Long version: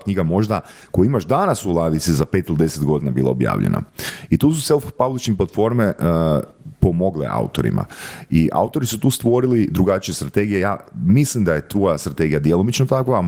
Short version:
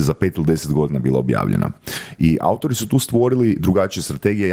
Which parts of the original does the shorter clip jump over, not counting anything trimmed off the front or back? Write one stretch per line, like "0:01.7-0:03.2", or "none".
0:04.3-0:08.3